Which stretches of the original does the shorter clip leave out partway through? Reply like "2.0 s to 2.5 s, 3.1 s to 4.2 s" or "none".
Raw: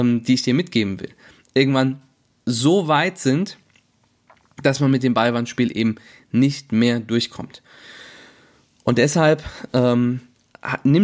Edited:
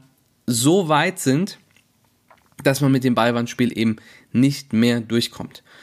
none